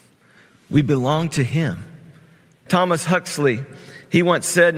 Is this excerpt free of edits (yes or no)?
no